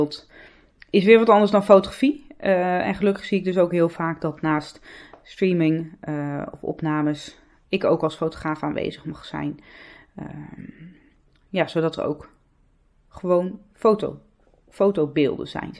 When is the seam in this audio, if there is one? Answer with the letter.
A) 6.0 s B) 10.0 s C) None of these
C